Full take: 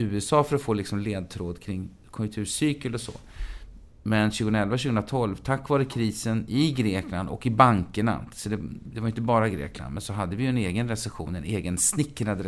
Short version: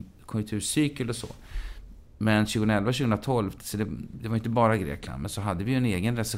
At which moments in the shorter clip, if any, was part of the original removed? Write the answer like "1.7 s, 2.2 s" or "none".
3.6 s